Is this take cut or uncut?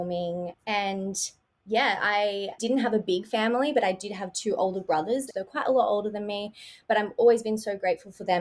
cut